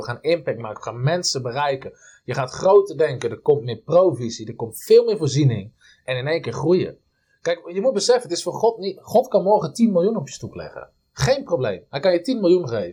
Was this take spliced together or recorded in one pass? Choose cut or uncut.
uncut